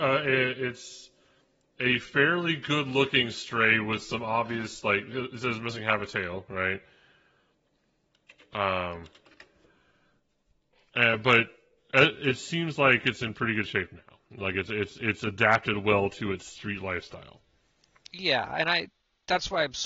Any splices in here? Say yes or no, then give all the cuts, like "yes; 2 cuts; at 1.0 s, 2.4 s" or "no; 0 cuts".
no; 0 cuts